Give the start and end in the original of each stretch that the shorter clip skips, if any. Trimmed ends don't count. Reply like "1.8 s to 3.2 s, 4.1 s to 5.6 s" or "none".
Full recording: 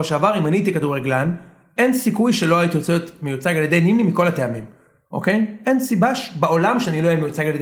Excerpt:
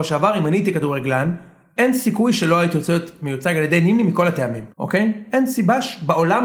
4.7 s to 5.1 s